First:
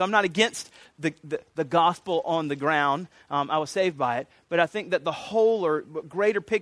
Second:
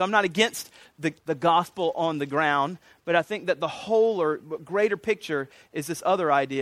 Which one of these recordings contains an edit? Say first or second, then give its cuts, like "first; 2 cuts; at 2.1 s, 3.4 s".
second; 2 cuts; at 1.2 s, 3.0 s